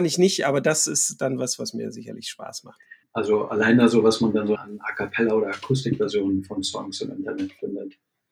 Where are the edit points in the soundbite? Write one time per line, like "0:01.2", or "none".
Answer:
0:03.0
0:04.6